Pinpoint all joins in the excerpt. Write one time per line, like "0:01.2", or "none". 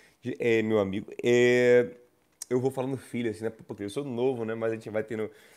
0:03.8

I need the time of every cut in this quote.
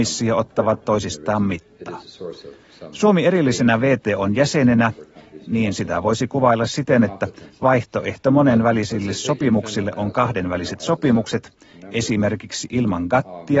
none

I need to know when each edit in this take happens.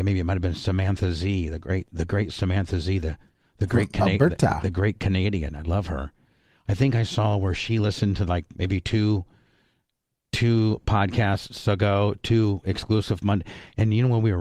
none

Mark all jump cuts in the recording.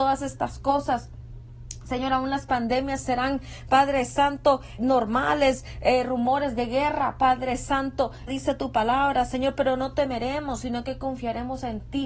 0:04.8
0:08.3

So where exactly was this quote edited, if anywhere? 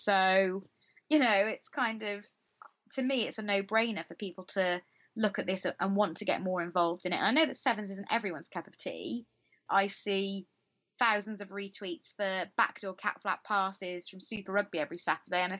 0:09.7

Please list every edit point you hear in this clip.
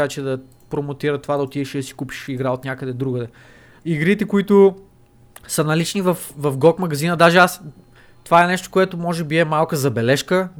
0:03.8

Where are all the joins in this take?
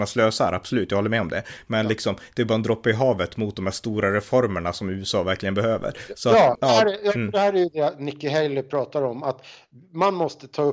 0:06.6

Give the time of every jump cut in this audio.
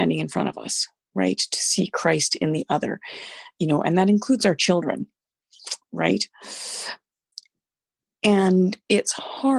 none

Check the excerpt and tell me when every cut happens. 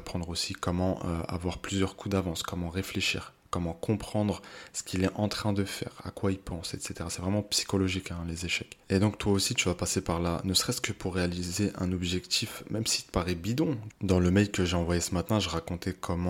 0:08.8

